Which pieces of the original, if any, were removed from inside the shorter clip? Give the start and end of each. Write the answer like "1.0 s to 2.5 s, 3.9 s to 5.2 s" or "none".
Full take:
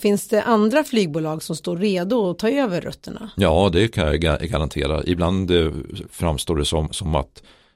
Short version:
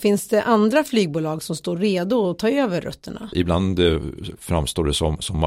3.3 s to 5.0 s

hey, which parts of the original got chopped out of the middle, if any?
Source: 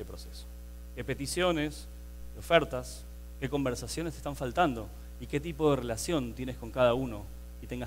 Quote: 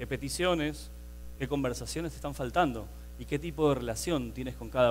2.3 s to 3.4 s

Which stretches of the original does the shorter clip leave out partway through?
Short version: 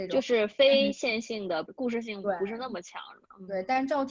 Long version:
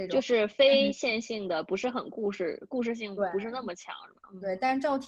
1.7 s to 2.6 s

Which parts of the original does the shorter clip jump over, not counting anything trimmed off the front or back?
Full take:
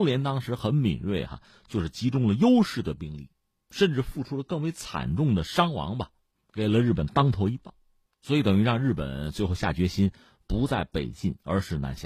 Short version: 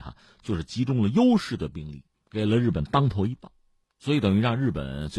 3.4 s to 6.4 s

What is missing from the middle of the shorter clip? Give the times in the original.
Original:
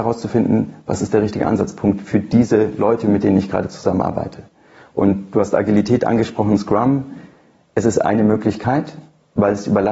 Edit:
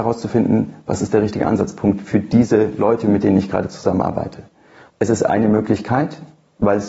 4.9 s to 7.6 s

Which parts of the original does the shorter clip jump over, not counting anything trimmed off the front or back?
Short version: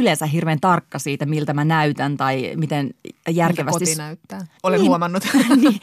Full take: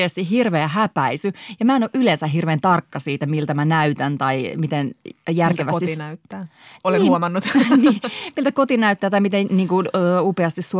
6.6 s to 6.8 s

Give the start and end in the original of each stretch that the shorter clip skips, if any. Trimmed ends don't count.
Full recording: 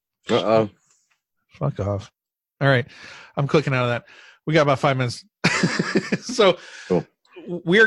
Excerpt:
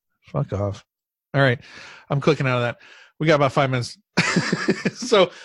none

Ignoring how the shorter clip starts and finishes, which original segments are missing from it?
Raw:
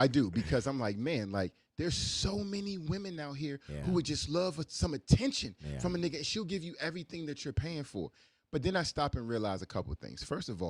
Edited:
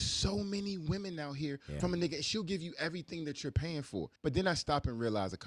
3.8 s to 5.8 s, 8.2 s to 8.4 s

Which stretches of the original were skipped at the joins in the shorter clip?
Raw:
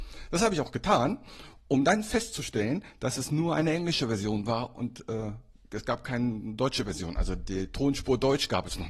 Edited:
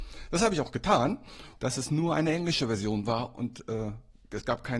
1.6 s to 3.0 s

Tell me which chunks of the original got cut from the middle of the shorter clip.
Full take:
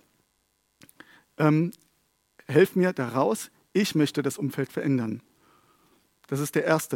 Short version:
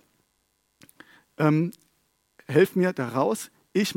none

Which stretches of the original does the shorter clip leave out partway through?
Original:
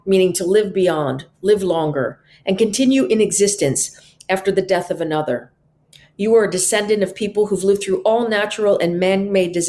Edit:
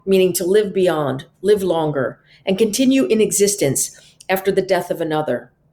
none

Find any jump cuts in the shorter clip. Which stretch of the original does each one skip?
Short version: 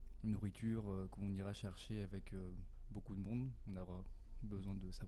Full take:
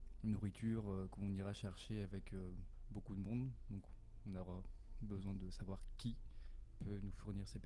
3.6 s to 4.2 s

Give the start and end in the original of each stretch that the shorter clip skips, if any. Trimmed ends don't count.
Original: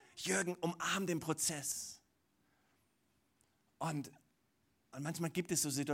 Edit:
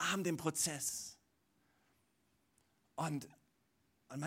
none

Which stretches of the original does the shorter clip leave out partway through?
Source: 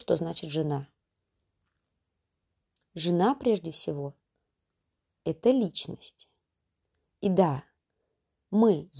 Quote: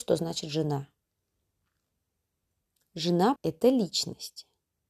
3.4 s to 5.2 s

